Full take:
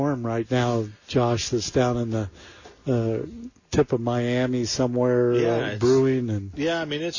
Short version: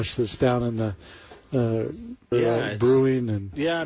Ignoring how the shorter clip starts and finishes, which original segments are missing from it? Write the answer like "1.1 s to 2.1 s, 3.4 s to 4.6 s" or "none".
3.7 s to 5.3 s